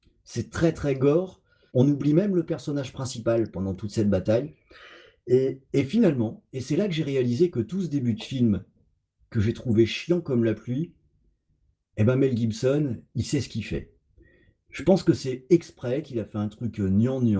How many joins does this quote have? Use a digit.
1